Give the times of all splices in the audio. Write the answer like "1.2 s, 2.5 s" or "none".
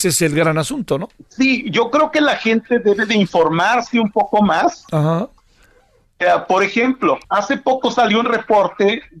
5.4 s, 7.2 s